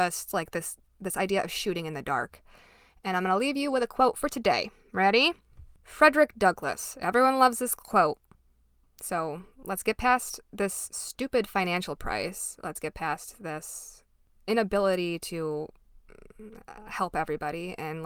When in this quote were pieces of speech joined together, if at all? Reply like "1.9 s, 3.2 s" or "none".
8.8 s